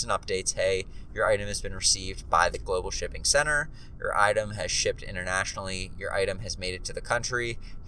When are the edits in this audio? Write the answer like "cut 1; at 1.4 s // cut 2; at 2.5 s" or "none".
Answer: none